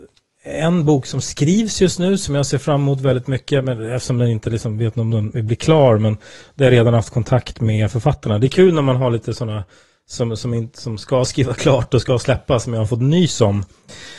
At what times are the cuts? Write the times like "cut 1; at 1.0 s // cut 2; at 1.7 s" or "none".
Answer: none